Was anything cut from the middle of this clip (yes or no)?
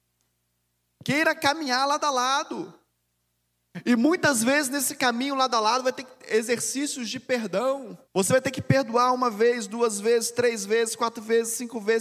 yes